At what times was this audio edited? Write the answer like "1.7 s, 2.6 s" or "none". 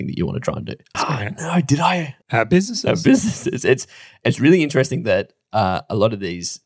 0.9 s, 2.2 s